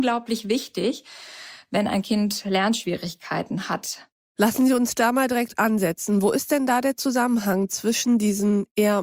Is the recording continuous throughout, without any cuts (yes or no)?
yes